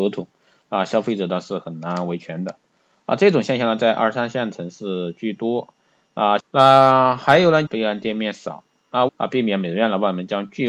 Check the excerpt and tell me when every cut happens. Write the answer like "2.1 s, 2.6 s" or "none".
6.4 s, 7.7 s, 9.1 s